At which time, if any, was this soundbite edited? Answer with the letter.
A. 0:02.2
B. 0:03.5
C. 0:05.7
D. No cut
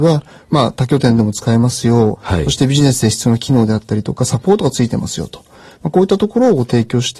A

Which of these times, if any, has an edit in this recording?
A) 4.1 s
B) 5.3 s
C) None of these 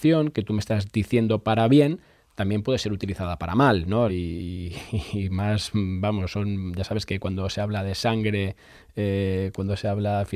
A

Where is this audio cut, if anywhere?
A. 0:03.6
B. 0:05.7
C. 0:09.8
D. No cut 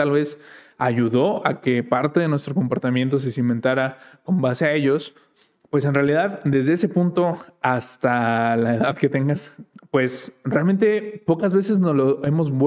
C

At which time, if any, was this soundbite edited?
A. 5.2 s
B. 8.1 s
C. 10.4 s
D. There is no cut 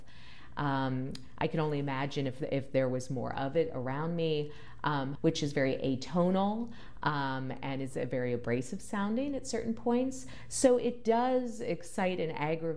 A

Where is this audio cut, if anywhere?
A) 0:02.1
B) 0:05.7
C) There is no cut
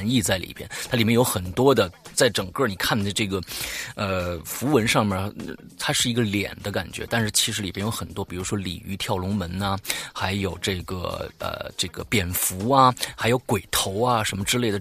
A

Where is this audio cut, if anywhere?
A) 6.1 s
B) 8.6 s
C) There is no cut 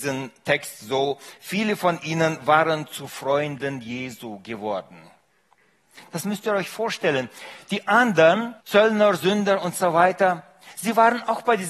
B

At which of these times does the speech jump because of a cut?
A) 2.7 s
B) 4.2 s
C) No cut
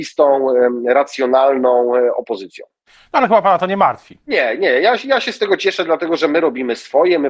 B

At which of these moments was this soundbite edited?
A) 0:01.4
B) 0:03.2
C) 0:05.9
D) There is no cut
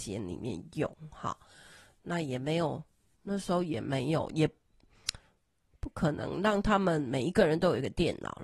B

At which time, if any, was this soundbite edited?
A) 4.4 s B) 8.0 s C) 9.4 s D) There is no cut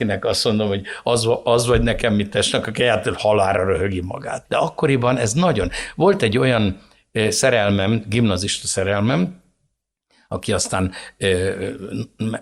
A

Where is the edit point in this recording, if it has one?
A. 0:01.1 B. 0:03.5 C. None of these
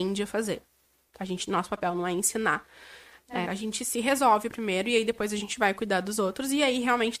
B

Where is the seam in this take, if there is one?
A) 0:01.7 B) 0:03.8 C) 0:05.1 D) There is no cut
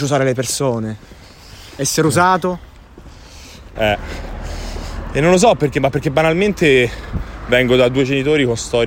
B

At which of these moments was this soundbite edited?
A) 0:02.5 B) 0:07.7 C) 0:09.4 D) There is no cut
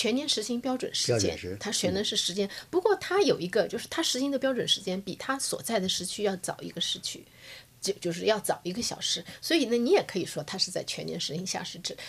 D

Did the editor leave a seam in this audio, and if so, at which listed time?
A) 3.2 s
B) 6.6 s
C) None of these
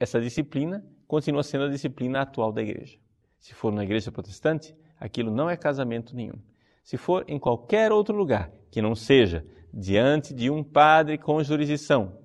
A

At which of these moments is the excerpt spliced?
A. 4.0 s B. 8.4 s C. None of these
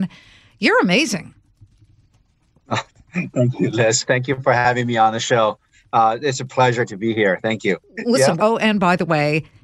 B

